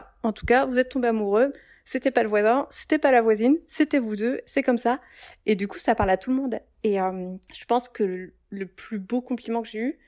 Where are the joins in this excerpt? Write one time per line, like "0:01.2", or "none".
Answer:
none